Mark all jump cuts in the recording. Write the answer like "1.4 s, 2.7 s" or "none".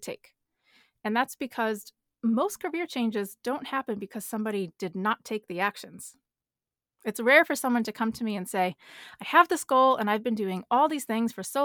none